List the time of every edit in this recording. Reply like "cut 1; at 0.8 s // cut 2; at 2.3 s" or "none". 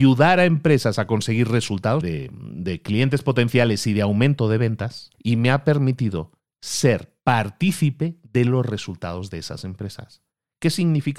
cut 1; at 2.0 s // cut 2; at 5.1 s